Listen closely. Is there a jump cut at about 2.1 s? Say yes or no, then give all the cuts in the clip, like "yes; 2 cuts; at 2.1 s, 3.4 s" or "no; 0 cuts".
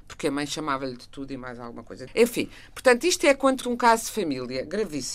yes; 2 cuts; at 2.1 s, 3.6 s